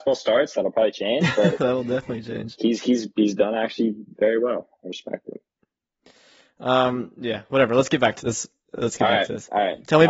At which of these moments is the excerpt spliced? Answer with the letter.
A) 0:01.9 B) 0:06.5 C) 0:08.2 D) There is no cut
C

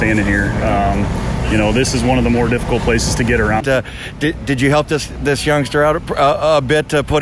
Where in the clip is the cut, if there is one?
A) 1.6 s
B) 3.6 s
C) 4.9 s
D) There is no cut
B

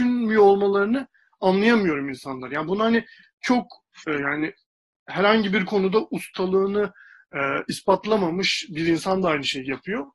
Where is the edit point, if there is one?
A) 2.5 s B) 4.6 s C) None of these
C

